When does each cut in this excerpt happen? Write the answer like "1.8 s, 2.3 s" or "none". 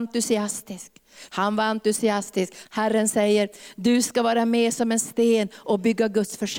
1.3 s, 2.7 s